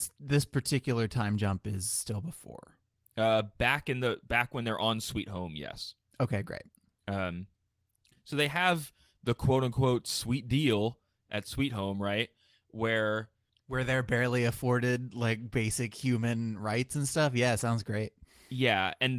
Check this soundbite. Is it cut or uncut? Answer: uncut